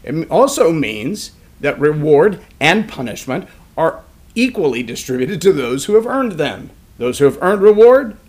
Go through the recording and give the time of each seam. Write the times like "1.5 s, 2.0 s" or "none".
none